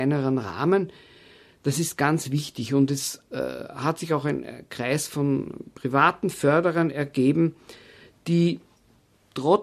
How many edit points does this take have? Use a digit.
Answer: 0